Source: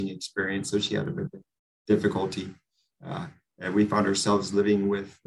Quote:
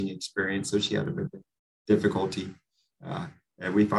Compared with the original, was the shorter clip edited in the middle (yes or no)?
no